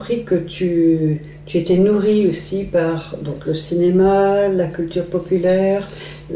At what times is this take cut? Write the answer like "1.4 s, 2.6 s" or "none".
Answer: none